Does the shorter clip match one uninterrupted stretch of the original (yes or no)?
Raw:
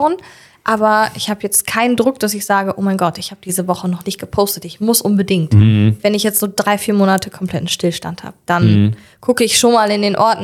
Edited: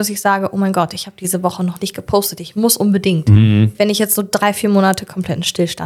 yes